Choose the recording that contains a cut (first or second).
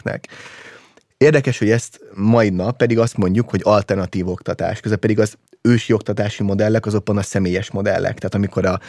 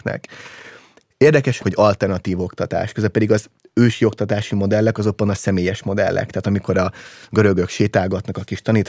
second